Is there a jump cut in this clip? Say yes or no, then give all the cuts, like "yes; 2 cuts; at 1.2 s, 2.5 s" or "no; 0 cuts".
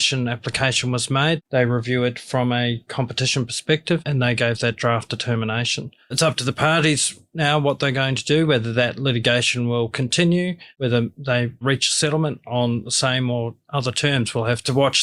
no; 0 cuts